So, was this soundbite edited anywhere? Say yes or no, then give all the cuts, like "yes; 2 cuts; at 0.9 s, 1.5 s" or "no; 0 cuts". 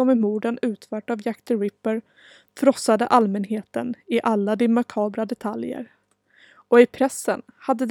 no; 0 cuts